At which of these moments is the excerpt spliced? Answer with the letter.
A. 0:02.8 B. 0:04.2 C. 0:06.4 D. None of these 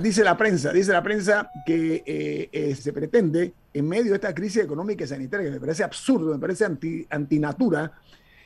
A